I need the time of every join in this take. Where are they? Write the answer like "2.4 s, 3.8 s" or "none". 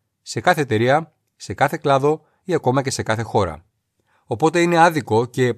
none